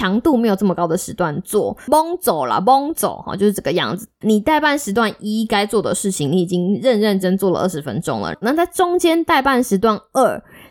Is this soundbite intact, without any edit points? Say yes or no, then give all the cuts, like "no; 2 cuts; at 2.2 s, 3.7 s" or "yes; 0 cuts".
no; 3 cuts; at 4.2 s, 7.2 s, 8.4 s